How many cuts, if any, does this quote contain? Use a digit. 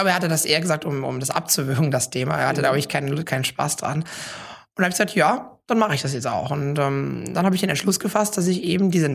0